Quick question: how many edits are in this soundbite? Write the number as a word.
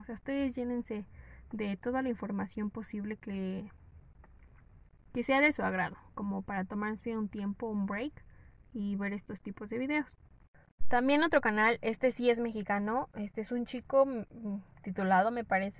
one